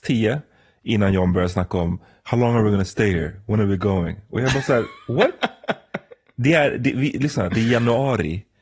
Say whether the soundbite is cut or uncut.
uncut